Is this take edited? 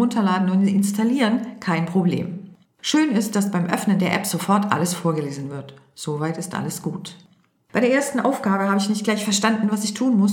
no; 0 cuts

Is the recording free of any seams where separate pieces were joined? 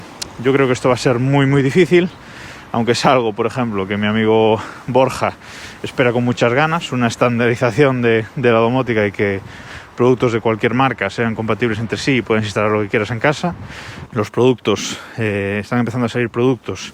no; 1 cut; at 14.0 s

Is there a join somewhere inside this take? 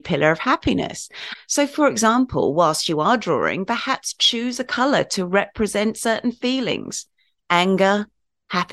yes; 1 cut; at 1.3 s

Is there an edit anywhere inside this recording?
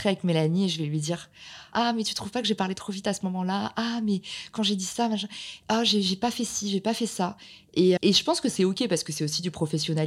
yes; 2 cuts; at 1.7 s, 8.0 s

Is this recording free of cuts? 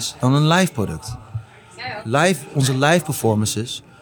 no; 1 cut; at 2.5 s

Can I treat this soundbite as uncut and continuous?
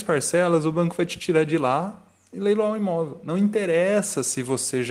yes; 0 cuts

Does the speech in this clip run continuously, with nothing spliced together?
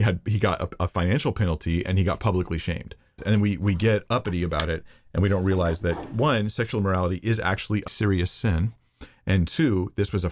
no; 2 cuts; at 3.2 s, 7.9 s

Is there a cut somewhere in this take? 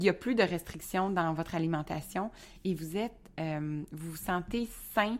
no; 0 cuts

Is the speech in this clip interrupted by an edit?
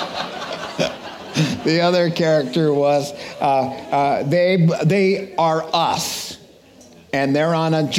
no; 0 cuts

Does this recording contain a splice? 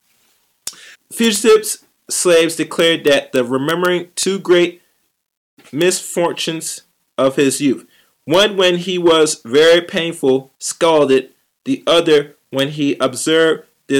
yes; 2 cuts; at 0.9 s, 10.5 s

